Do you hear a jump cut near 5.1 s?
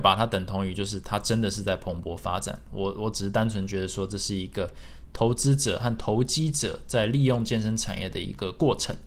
no; 0 cuts

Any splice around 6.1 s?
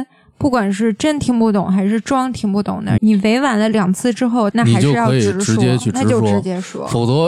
no; 2 cuts; at 3.0 s, 4.5 s

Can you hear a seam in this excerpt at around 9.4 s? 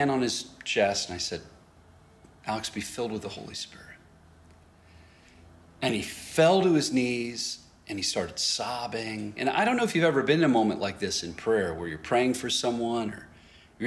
yes; 1 cut; at 9.4 s

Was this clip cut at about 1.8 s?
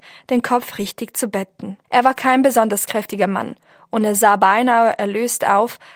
yes; 1 cut; at 1.8 s

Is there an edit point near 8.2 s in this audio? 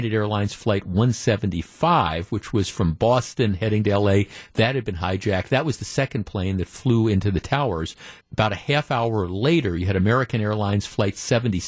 yes; 1 cut; at 8.2 s

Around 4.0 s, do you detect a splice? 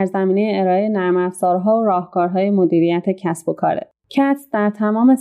yes; 1 cut; at 4.0 s

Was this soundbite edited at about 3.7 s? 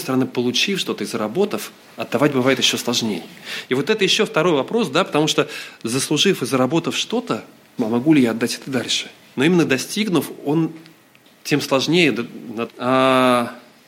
no; 3 cuts; at 7.8 s, 9.3 s, 12.7 s

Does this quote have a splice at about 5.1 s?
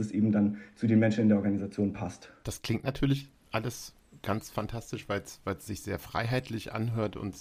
no; 1 cut; at 2.4 s

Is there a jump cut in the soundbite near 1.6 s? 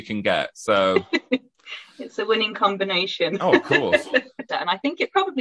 no; 1 cut; at 4.5 s

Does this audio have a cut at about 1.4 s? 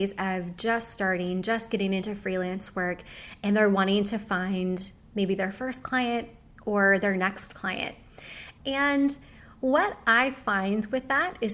no; 1 cut; at 8.6 s

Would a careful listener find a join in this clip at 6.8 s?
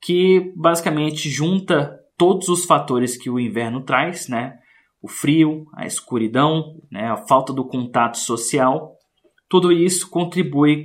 yes; 1 cut; at 6.8 s

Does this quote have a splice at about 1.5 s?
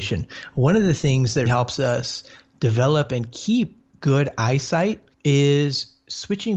yes; 2 cuts; at 1.5 s, 5.1 s

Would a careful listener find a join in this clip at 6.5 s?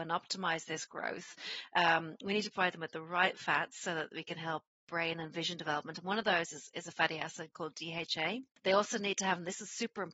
no; 0 cuts

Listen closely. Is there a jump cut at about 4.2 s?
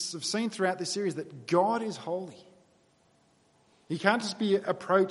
no; 0 cuts

